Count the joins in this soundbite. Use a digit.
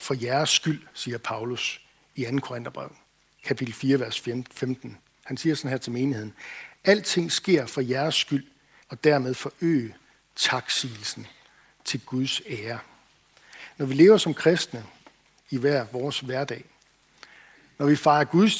1